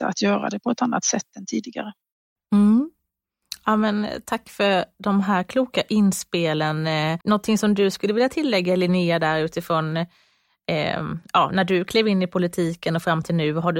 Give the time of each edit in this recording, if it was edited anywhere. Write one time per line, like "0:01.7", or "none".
0:07.2